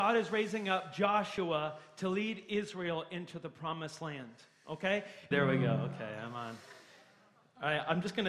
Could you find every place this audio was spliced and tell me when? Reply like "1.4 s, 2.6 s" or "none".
5.3 s